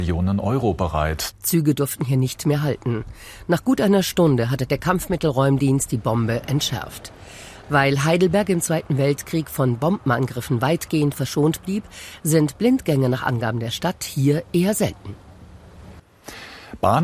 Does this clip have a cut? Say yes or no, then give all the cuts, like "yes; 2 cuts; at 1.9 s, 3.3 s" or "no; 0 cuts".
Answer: yes; 1 cut; at 1.3 s